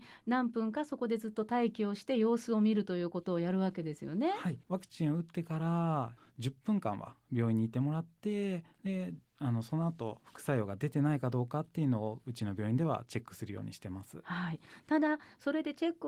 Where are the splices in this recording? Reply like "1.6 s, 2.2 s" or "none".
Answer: 4.6 s